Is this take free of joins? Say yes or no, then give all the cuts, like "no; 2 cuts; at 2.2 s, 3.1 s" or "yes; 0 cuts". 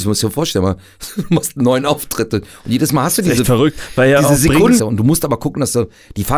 no; 1 cut; at 4.8 s